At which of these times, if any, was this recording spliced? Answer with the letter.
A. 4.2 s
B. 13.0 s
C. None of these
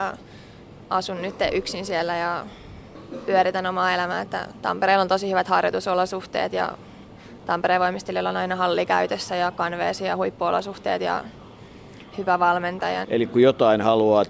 B